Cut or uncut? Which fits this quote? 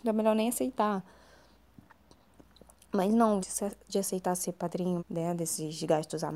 cut